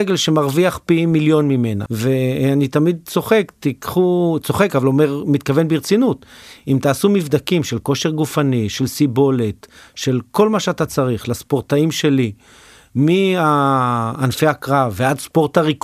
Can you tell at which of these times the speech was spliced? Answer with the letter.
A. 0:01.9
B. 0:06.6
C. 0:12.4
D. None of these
A